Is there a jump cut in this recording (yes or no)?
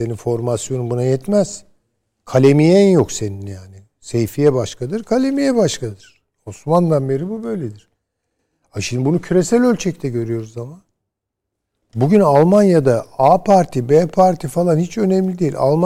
no